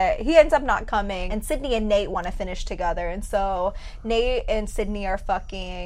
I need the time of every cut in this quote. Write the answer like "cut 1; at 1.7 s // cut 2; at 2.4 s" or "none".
none